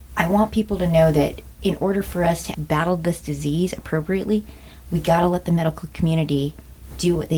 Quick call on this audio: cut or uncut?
cut